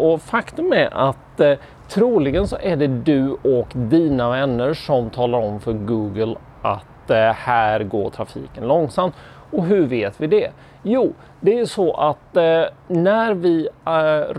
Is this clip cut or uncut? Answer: uncut